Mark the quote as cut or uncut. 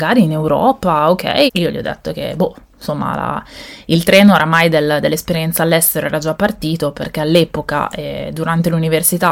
cut